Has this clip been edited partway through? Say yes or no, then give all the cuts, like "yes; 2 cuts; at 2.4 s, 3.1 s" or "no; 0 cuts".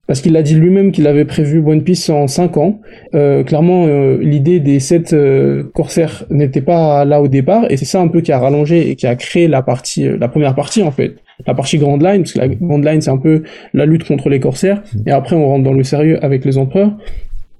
yes; 1 cut; at 3.1 s